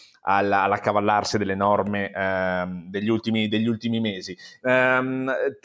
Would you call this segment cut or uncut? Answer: cut